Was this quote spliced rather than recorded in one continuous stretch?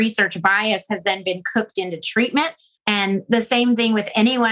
yes; 1 cut; at 2.8 s

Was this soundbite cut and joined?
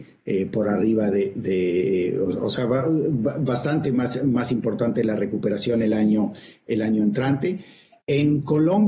no; 0 cuts

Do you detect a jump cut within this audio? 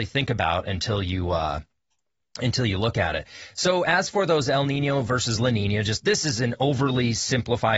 no; 0 cuts

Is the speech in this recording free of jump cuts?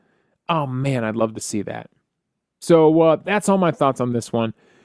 yes; 0 cuts

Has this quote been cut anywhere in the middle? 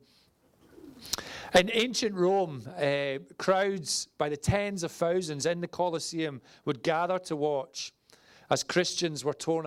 no; 0 cuts

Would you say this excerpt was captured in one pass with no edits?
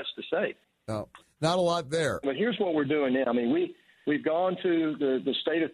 no; 1 cut; at 2.2 s

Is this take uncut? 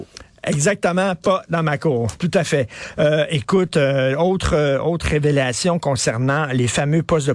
yes; 0 cuts

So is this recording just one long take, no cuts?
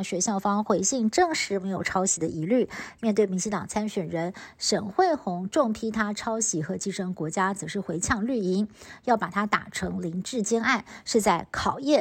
yes; 0 cuts

